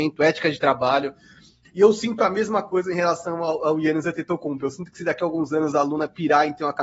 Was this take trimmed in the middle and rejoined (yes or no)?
yes